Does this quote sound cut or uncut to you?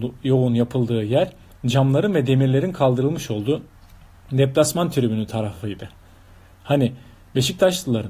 uncut